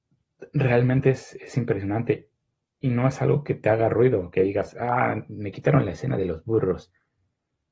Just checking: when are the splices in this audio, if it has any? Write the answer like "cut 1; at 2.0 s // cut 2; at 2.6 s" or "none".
none